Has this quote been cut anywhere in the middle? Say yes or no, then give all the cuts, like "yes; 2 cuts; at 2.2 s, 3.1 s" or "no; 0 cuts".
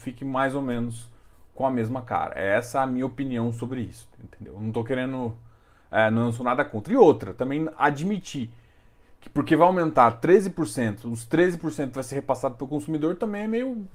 no; 0 cuts